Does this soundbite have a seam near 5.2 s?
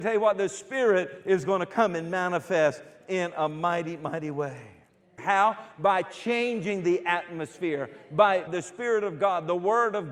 yes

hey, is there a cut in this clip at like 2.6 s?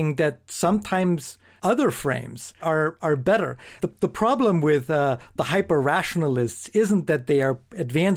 yes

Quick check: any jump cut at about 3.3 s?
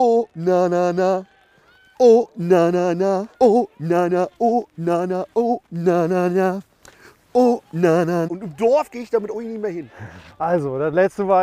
yes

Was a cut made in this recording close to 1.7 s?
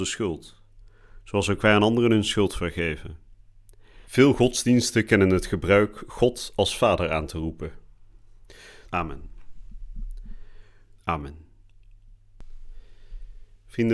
no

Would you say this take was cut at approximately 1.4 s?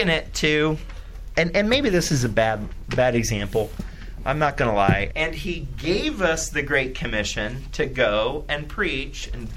no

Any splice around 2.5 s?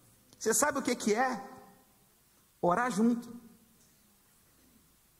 no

